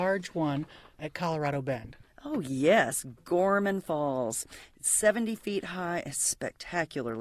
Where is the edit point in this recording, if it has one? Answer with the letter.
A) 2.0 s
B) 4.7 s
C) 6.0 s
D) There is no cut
D